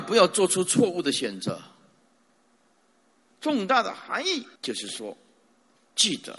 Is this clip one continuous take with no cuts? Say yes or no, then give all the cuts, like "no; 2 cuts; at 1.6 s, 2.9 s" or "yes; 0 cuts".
no; 2 cuts; at 3.3 s, 4.6 s